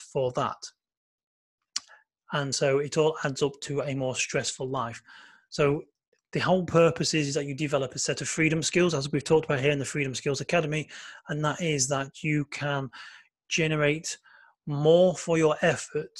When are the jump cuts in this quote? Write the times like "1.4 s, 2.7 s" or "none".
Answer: none